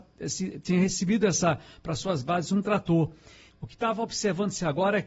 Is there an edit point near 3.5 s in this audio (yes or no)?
yes